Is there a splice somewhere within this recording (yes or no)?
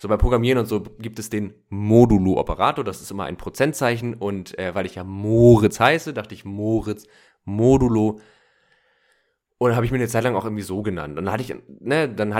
no